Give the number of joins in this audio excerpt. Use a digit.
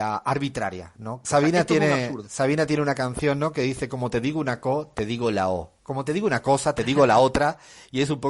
1